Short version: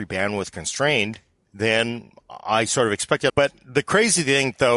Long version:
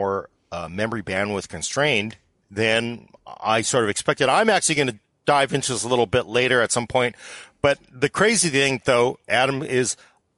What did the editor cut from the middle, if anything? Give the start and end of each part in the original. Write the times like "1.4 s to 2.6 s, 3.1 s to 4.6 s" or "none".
4.3 s to 7.6 s